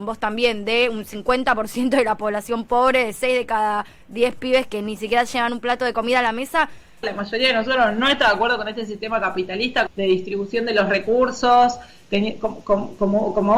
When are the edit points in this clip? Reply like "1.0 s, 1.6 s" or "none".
7.0 s, 9.9 s